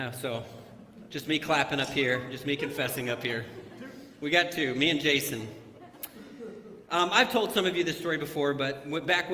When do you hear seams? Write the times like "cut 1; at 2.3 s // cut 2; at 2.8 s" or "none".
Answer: none